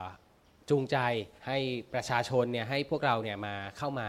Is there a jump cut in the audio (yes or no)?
yes